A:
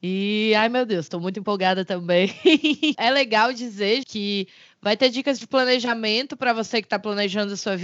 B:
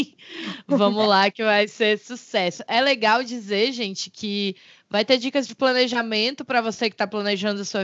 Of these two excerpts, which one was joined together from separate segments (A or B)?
A